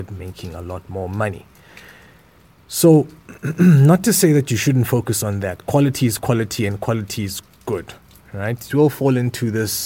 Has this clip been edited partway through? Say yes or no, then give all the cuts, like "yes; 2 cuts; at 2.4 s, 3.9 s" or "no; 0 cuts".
yes; 1 cut; at 8.7 s